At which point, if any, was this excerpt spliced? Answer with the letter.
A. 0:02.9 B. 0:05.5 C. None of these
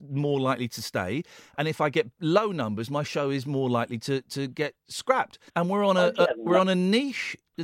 B